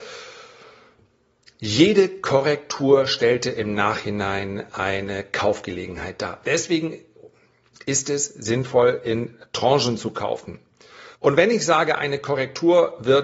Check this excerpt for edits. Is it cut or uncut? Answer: cut